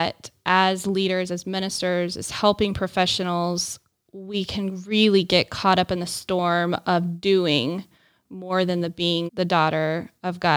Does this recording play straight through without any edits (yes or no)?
no